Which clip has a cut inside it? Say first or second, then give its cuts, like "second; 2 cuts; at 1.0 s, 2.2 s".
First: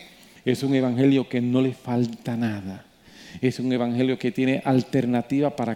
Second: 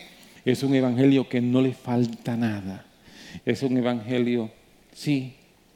second; 1 cut; at 3.4 s